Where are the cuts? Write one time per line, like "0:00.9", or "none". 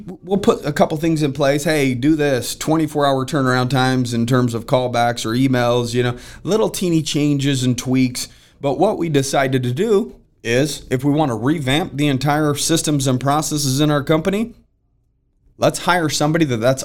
none